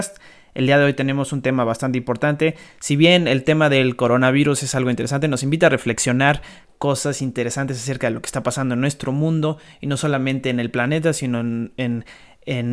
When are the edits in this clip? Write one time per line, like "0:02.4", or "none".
none